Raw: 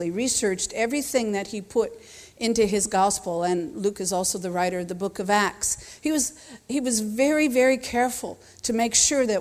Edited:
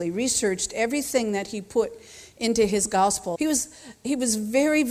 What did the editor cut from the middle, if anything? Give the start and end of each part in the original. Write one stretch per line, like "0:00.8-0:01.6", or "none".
0:03.4-0:06.0